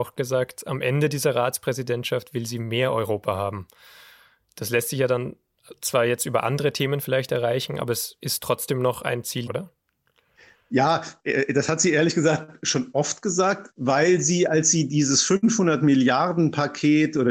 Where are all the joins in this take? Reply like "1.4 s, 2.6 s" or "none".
9.5 s, 13.7 s